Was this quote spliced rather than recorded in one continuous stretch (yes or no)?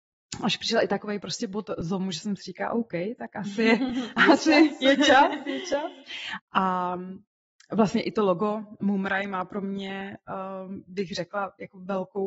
yes